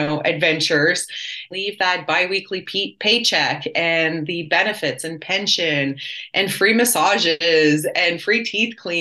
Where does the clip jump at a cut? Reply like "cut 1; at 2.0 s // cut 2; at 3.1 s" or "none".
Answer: cut 1; at 1.5 s